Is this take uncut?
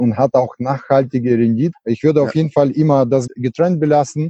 no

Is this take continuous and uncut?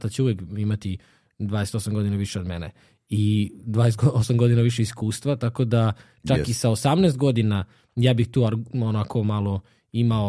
yes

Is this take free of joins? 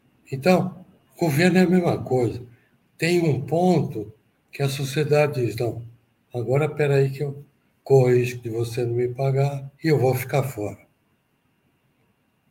no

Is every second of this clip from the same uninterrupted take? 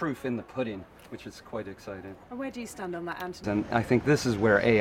no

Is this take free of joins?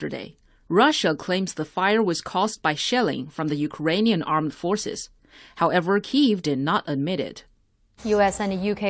no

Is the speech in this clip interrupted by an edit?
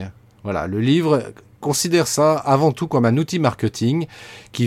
no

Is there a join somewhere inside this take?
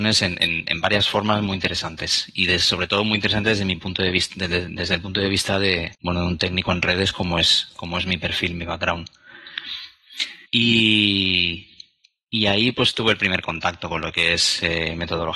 yes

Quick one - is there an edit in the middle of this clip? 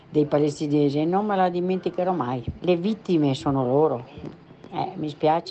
yes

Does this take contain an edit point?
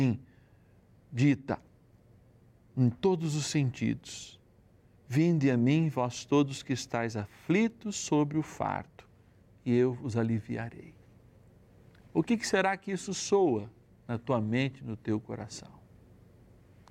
yes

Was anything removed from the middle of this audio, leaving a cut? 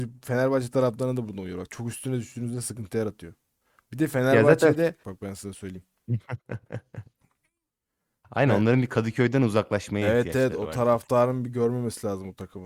yes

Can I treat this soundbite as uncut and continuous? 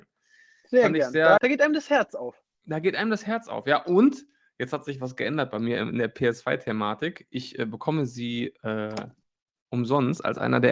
no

